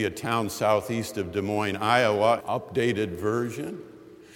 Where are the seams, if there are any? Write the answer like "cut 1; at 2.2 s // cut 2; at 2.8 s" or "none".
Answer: cut 1; at 2.4 s